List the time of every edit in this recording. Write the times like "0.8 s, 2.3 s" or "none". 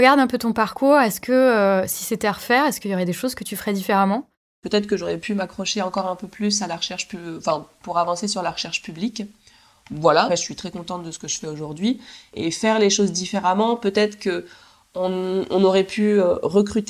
10.3 s